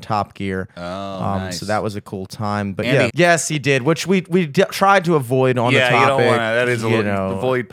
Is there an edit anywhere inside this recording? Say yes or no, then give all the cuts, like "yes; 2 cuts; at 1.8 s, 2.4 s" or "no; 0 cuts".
yes; 1 cut; at 3.1 s